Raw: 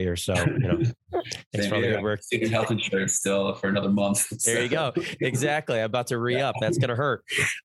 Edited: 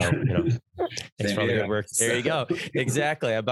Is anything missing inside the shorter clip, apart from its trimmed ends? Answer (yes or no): yes